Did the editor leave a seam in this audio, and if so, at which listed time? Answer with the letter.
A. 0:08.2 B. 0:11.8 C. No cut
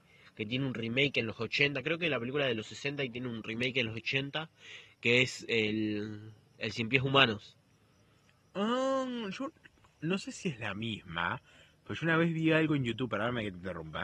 C